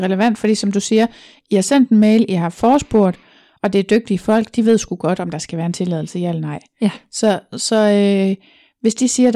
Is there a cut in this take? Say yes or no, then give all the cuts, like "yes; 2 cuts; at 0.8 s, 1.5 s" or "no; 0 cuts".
no; 0 cuts